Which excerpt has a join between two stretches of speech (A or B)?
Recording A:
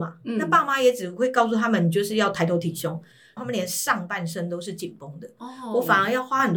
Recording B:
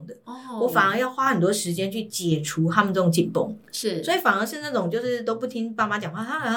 A